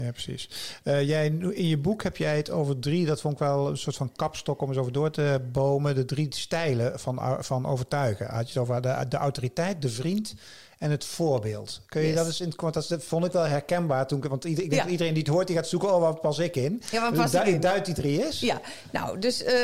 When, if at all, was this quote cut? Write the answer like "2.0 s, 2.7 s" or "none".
none